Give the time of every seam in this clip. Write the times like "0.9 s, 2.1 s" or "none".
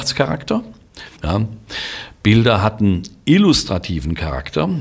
1.2 s